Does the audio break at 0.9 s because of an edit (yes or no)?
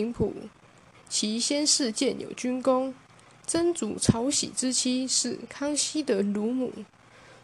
yes